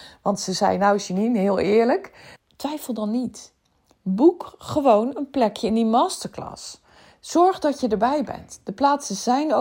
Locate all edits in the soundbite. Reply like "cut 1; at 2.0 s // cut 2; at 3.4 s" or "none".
cut 1; at 2.4 s